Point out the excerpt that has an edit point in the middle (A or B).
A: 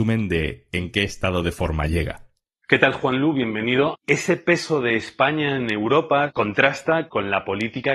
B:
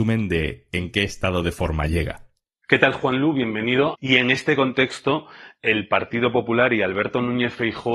B